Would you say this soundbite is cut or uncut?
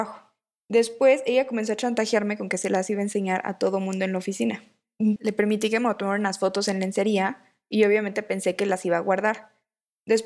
cut